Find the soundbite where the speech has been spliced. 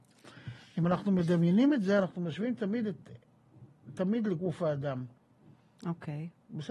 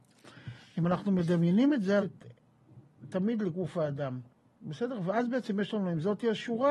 second; 2 cuts; at 2.0 s, 4.5 s

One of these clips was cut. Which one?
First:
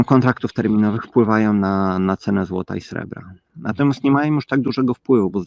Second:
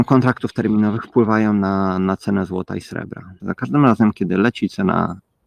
second; 1 cut; at 3.4 s

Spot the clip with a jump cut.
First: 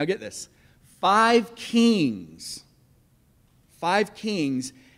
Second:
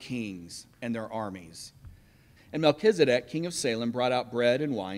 second; 1 cut; at 2.4 s

